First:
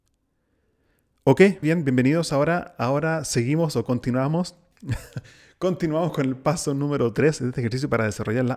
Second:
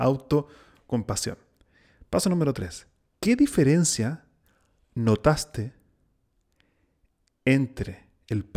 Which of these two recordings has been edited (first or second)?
first